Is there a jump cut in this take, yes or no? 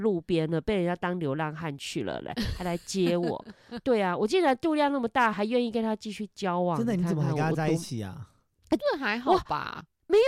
yes